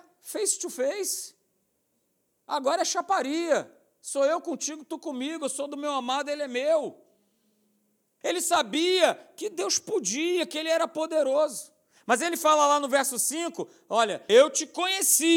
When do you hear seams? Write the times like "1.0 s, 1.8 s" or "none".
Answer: 8.2 s, 14.3 s